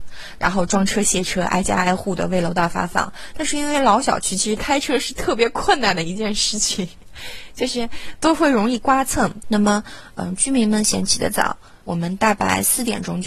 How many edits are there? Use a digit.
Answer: 2